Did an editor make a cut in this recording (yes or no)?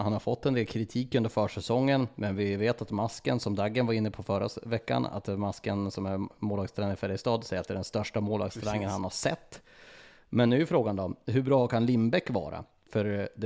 no